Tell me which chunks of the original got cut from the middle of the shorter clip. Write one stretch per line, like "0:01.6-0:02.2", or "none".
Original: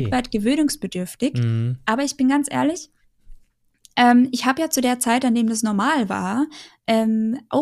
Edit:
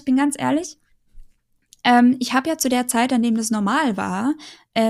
none